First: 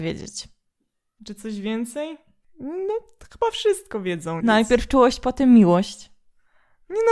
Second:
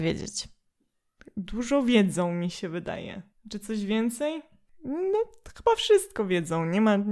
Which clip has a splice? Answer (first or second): first